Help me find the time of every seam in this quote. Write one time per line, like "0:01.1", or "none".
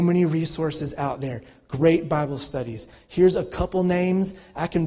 none